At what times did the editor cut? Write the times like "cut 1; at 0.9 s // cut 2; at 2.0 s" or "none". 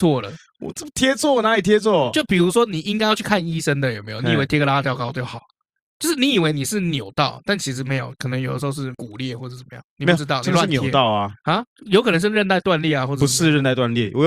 cut 1; at 8.9 s // cut 2; at 11.7 s